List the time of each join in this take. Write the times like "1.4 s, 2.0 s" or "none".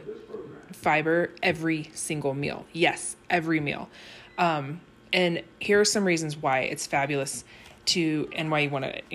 none